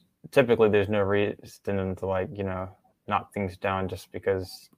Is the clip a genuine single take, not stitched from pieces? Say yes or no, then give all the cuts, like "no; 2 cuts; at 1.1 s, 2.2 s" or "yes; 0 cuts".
yes; 0 cuts